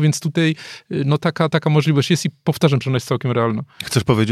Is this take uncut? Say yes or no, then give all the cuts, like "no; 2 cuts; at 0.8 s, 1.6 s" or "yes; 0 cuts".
no; 2 cuts; at 1.5 s, 2.8 s